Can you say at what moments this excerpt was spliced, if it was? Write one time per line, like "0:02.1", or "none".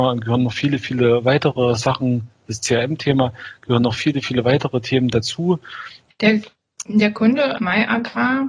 0:06.1
0:07.6